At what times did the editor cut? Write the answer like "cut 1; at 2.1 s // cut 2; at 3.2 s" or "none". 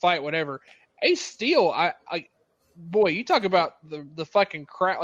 none

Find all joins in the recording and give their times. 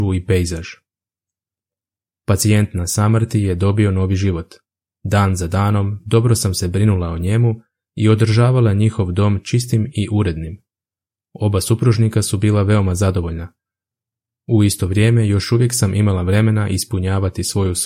cut 1; at 4.9 s

